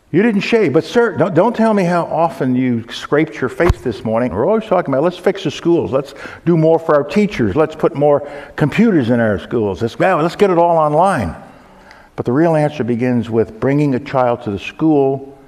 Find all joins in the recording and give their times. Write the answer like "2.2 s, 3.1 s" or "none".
4.3 s, 12.1 s